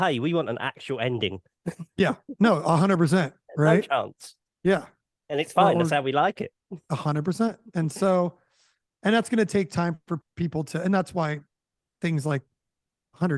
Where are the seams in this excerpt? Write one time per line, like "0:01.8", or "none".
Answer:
none